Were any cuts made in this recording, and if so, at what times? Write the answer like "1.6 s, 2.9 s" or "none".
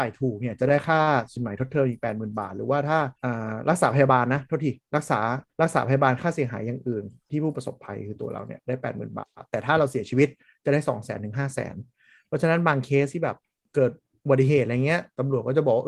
3.1 s, 5.5 s